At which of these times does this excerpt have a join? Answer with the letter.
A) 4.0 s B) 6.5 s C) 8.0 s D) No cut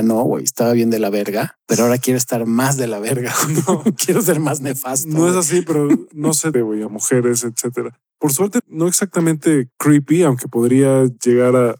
B